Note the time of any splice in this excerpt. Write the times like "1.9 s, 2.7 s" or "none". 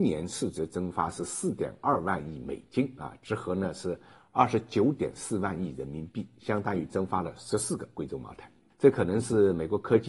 none